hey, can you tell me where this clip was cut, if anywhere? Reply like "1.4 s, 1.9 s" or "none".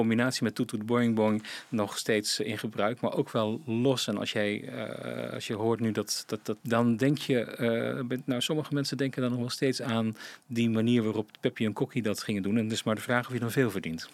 6.6 s